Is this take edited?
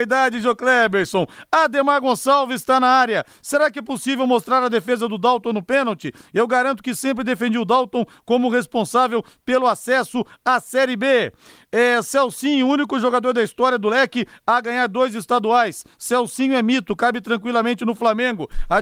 no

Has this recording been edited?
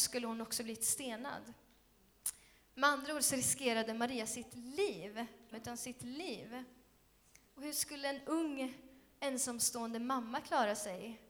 yes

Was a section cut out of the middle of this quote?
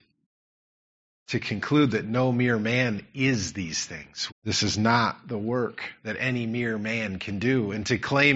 yes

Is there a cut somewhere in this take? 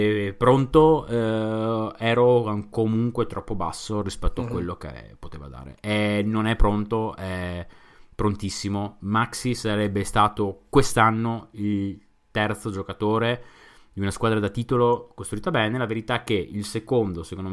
no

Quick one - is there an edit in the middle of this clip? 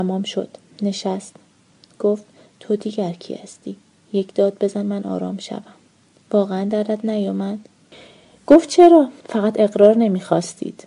yes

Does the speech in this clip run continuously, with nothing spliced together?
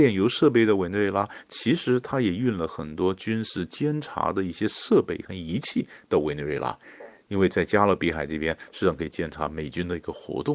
yes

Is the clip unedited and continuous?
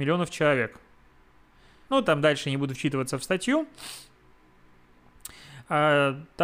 no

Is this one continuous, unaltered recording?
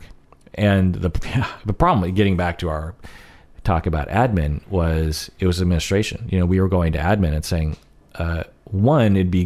yes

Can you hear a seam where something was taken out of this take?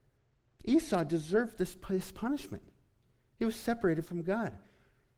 no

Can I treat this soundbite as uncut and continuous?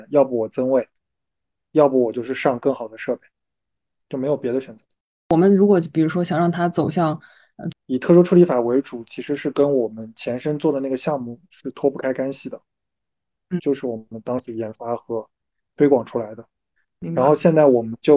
no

